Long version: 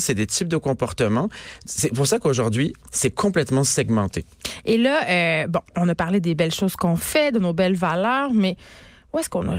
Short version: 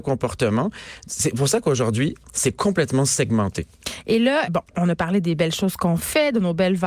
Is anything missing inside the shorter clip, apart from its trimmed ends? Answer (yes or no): yes